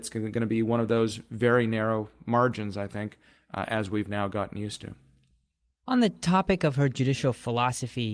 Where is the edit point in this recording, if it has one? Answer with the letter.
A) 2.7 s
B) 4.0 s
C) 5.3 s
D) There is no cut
D